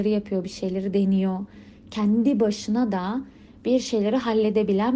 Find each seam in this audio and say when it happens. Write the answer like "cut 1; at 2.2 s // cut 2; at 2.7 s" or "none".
none